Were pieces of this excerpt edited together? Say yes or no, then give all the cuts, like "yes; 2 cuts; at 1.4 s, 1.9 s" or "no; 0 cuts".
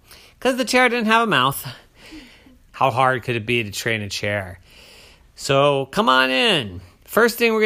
yes; 1 cut; at 2.7 s